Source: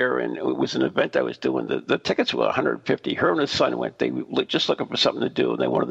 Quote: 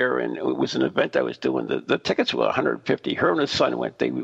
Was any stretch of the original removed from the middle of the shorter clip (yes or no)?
no